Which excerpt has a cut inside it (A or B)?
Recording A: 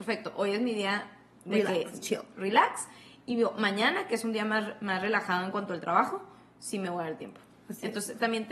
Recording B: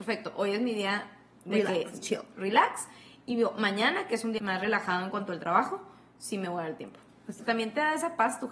B